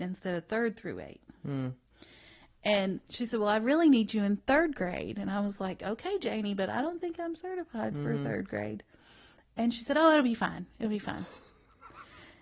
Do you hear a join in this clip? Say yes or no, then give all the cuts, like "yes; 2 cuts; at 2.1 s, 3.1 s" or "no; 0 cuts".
no; 0 cuts